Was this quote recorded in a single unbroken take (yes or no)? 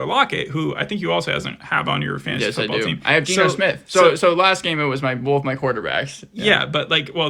yes